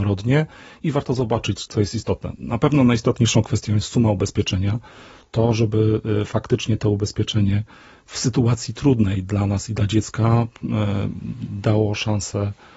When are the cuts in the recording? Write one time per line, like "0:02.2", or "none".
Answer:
none